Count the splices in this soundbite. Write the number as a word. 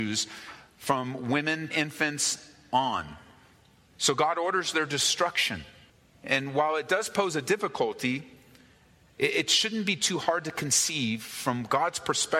one